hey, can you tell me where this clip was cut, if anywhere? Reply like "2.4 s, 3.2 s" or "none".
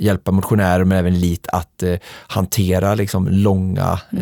none